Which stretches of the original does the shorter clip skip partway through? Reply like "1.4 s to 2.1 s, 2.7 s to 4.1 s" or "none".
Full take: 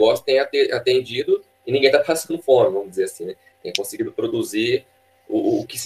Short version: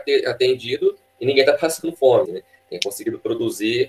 2.7 s to 3.2 s